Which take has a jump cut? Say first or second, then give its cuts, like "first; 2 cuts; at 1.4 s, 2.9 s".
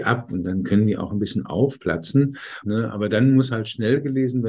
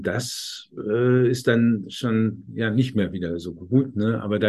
first; 1 cut; at 2.6 s